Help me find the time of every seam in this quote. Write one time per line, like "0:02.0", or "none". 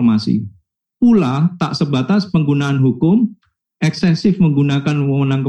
0:03.6